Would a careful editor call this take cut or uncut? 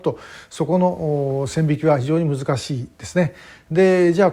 uncut